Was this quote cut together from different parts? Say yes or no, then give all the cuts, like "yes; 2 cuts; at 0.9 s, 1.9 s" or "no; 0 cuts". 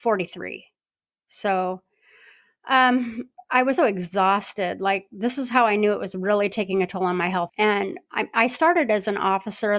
yes; 2 cuts; at 3.8 s, 7.5 s